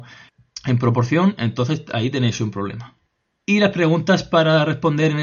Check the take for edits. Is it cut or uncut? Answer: uncut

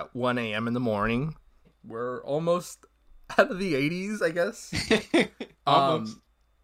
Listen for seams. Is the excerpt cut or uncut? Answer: cut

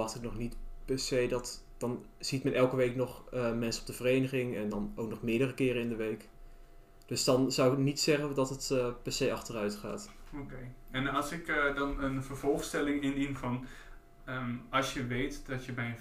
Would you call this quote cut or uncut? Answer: uncut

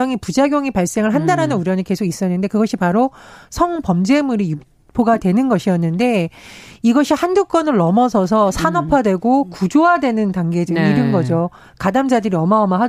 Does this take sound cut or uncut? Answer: uncut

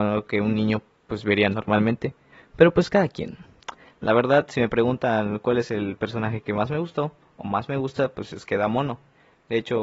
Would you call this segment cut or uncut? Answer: uncut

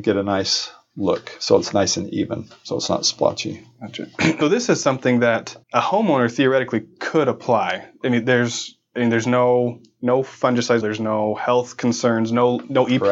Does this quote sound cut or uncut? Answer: cut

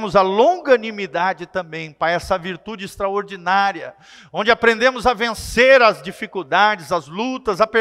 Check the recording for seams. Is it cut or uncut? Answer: uncut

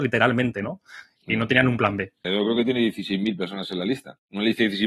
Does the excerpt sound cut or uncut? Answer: cut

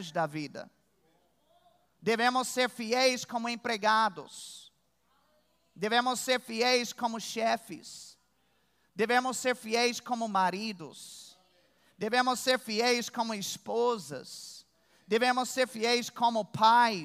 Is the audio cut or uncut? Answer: uncut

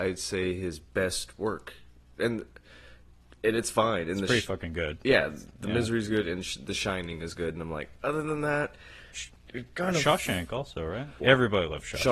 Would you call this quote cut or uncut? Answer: cut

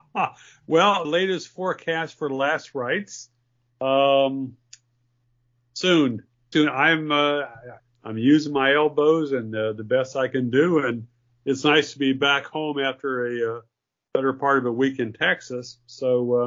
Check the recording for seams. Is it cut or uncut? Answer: cut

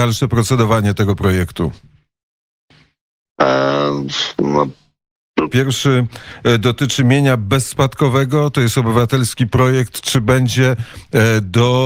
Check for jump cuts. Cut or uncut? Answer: cut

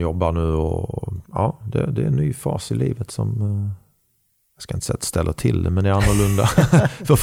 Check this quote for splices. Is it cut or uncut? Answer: cut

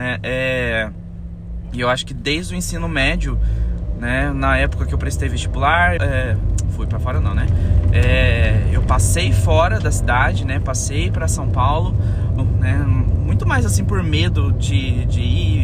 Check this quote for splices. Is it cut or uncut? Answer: cut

